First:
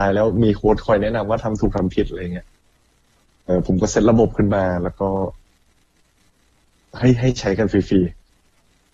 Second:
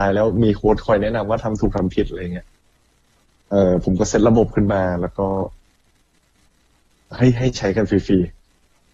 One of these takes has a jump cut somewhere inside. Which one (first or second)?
first